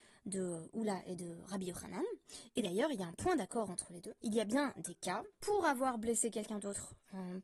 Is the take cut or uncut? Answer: cut